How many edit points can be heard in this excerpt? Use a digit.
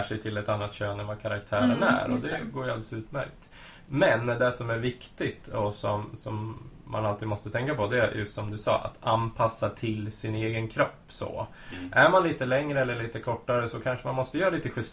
0